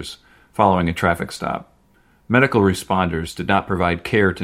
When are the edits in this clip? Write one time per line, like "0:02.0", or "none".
none